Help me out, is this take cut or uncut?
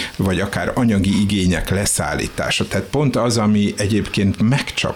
uncut